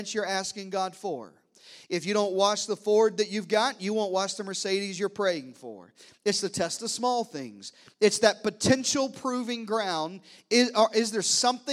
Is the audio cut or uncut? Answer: uncut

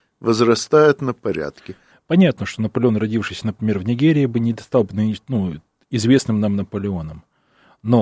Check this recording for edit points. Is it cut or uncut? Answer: cut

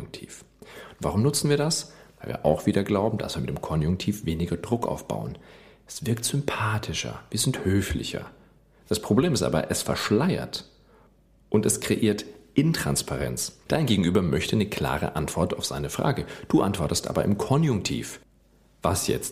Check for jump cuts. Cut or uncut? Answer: uncut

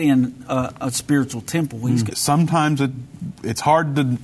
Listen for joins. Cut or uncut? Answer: cut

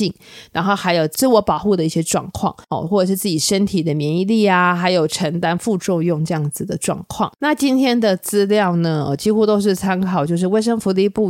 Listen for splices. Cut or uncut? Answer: uncut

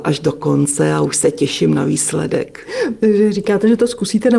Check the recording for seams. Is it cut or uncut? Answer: uncut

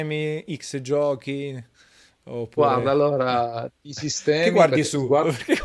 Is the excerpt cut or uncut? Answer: uncut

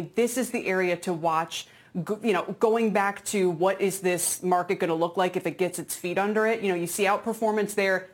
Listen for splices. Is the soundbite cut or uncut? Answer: uncut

